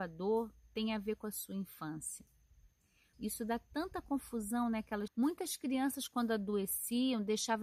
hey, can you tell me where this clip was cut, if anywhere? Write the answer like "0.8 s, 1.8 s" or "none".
3.1 s, 5.1 s